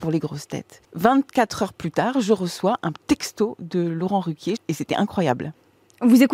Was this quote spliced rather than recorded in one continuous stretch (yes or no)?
yes